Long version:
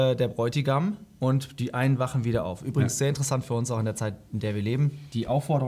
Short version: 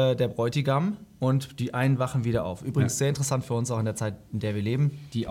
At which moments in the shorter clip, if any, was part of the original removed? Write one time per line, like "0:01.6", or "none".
none